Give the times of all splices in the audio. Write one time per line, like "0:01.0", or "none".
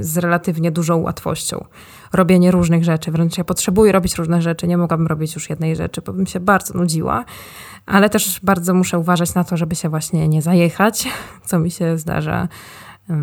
none